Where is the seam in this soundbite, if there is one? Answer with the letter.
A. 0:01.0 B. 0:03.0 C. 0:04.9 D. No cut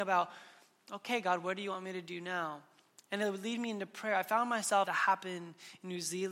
C